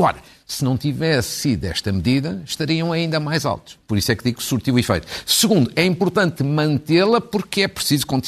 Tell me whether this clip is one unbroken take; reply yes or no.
yes